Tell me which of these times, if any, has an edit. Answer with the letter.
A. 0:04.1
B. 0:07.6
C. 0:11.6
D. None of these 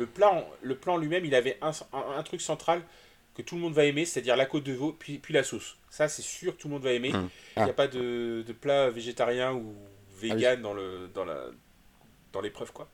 B